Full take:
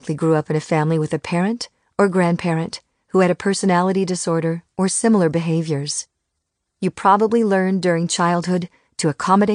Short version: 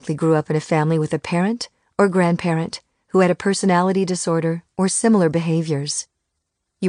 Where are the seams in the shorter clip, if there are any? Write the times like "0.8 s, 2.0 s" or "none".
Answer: none